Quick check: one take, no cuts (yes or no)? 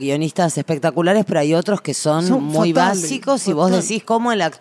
yes